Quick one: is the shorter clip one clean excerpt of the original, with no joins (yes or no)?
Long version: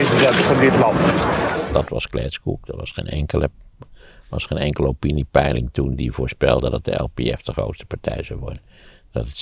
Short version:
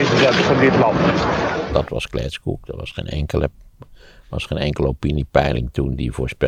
yes